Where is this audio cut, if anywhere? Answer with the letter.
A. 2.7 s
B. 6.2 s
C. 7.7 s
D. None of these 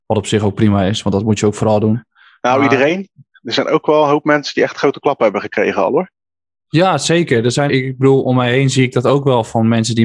C